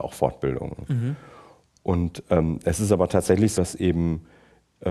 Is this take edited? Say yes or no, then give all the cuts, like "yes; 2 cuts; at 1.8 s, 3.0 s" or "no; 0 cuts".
yes; 1 cut; at 3.6 s